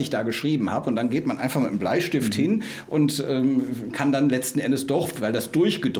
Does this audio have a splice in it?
no; 0 cuts

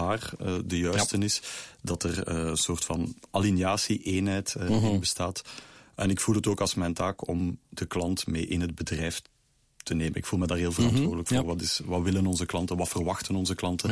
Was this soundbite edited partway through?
yes; 1 cut; at 7.6 s

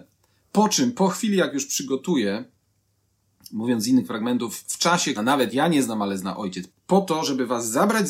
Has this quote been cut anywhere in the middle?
yes; 2 cuts; at 5.2 s, 6.7 s

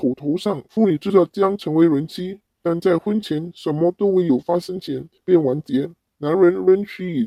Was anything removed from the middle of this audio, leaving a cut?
no; 0 cuts

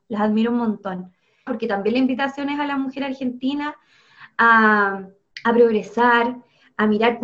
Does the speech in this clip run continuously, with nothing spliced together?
no; 1 cut; at 1.5 s

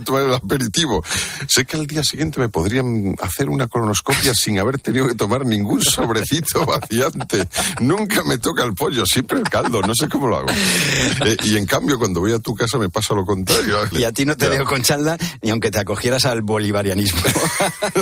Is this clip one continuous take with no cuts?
no; 2 cuts; at 11.2 s, 13.9 s

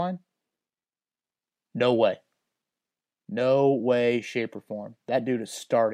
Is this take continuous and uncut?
yes; 0 cuts

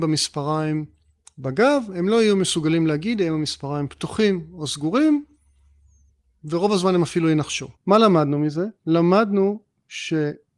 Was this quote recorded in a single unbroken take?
no; 1 cut; at 7.8 s

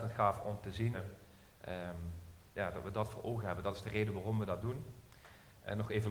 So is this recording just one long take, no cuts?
no; 1 cut; at 0.9 s

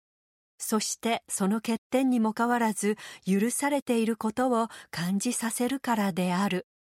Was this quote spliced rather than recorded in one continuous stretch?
yes; 1 cut; at 2.3 s

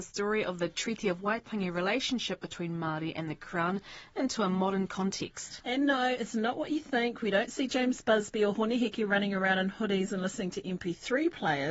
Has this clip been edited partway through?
no; 0 cuts

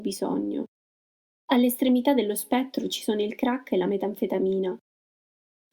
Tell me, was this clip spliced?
no; 0 cuts

